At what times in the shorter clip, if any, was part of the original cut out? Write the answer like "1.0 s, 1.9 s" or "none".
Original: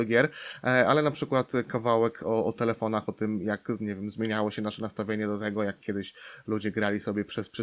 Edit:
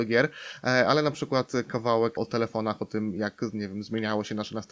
2.2 s